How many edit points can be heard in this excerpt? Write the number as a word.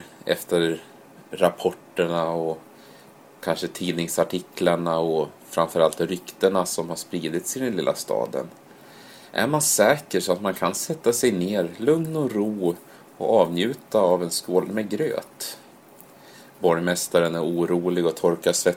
zero